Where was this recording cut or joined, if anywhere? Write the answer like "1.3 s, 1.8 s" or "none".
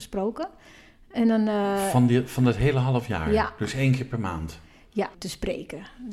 5.1 s